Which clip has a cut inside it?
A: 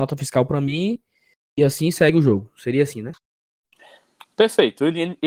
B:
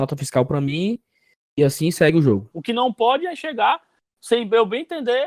B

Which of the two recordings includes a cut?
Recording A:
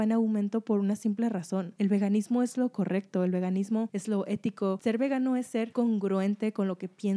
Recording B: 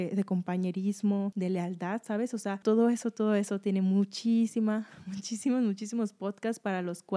B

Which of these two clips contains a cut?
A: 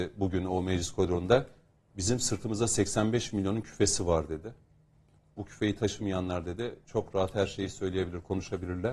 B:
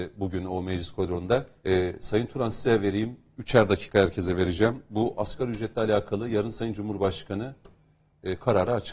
B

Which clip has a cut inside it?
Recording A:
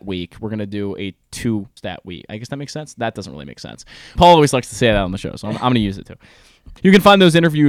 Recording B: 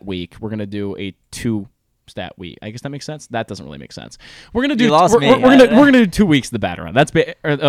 A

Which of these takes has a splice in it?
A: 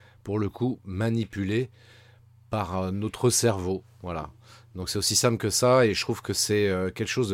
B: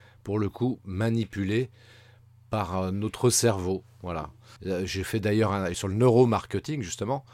B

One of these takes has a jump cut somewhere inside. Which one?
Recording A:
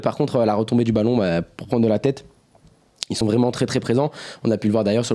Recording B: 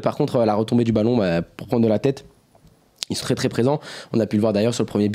B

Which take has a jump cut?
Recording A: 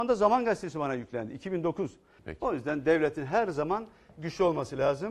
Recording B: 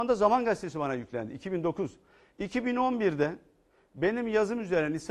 A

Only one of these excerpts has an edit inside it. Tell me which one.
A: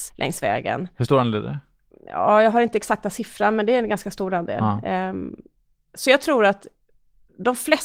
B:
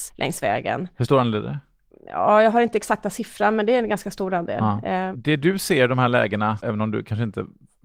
B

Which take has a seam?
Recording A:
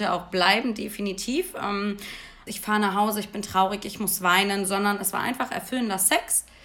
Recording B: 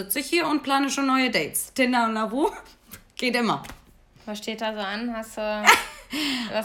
A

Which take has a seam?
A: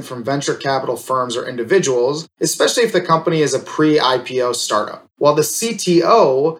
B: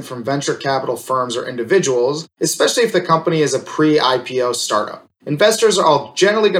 A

